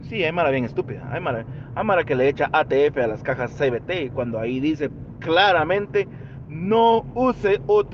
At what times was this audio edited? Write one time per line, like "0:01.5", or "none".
none